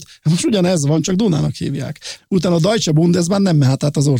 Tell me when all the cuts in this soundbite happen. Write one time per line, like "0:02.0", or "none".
0:02.2